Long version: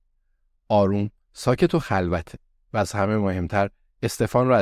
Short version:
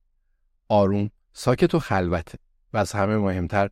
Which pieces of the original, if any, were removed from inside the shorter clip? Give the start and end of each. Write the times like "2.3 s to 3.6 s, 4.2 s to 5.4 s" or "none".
none